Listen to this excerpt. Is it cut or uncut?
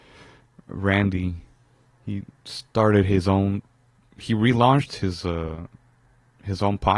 uncut